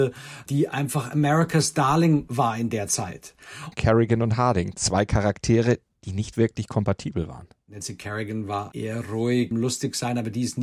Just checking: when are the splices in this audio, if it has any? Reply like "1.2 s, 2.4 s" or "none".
3.7 s, 9.5 s